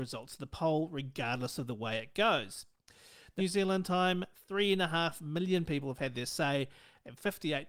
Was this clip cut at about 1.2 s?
no; 1 cut; at 3.4 s

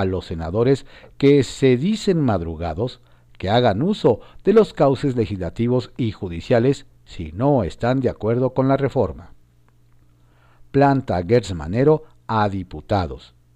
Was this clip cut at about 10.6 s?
no; 0 cuts

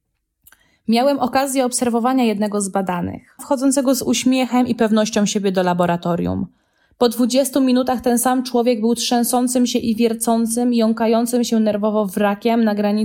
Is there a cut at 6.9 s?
no; 1 cut; at 3.4 s

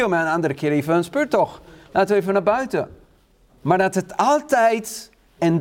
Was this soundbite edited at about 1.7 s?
no; 0 cuts

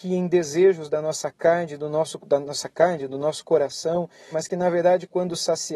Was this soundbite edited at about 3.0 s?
no; 1 cut; at 4.3 s

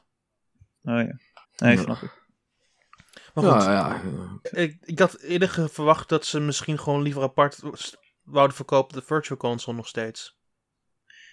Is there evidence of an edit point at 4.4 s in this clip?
yes; 2 cuts; at 1.4 s, 4.4 s

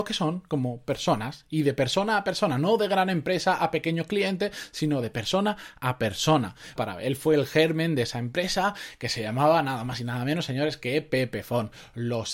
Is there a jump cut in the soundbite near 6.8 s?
yes; 1 cut; at 6.8 s

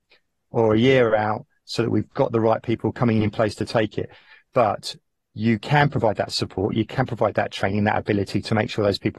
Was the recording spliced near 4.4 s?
yes; 1 cut; at 4.4 s

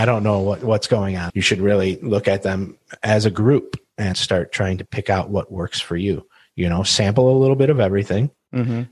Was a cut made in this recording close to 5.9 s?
no; 2 cuts; at 1.3 s, 4.1 s

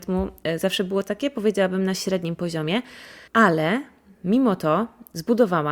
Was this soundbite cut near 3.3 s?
yes; 1 cut; at 3.3 s

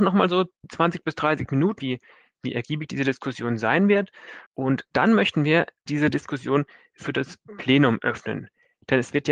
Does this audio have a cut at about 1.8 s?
yes; 3 cuts; at 1.8 s, 4.5 s, 5.9 s

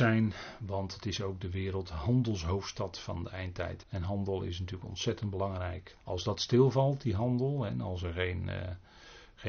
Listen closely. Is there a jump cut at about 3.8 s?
yes; 2 cuts; at 3.8 s, 6.0 s

